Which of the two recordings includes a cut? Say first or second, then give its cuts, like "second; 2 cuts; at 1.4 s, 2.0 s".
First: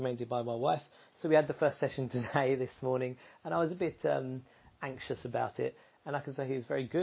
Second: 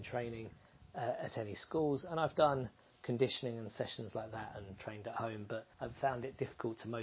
second; 1 cut; at 5.7 s